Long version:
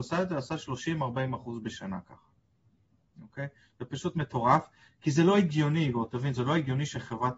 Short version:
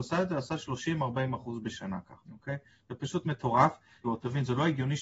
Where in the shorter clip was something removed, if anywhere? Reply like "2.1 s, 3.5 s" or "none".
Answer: 2.2 s, 4.0 s